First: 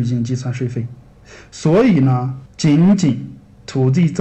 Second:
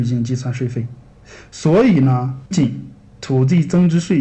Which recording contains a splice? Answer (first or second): second